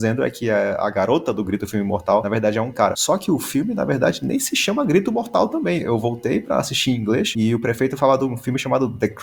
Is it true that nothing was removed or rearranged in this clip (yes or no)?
yes